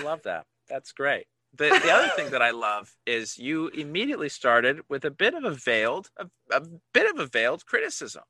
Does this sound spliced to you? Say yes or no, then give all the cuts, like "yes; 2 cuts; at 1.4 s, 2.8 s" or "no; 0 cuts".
yes; 1 cut; at 6.1 s